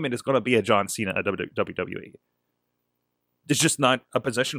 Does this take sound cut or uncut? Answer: uncut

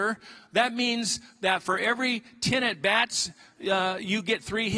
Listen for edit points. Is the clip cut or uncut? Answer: uncut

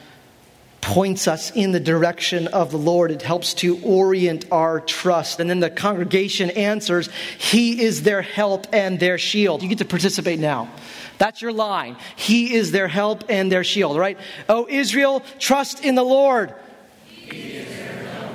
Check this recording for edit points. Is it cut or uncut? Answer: cut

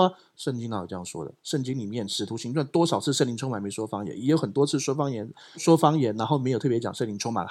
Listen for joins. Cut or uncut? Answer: cut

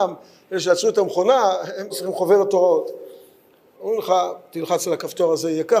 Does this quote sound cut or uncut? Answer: cut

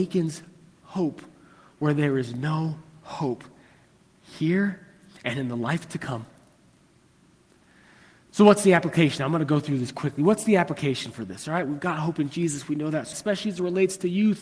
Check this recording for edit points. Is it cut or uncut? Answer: cut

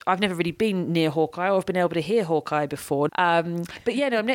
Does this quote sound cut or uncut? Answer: cut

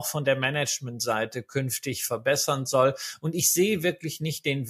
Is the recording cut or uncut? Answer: uncut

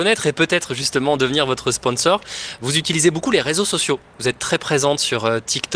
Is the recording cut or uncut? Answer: uncut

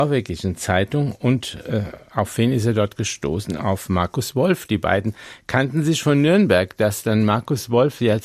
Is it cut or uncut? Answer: uncut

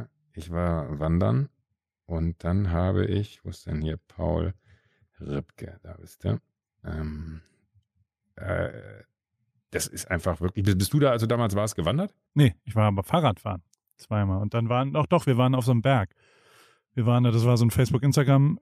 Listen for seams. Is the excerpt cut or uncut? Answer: cut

